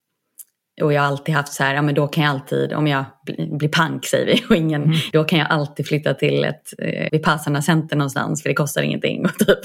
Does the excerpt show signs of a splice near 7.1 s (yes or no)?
yes